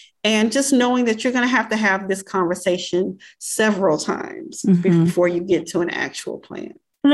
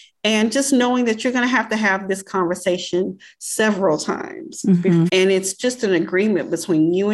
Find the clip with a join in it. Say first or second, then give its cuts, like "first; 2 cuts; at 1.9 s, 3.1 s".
second; 1 cut; at 5.1 s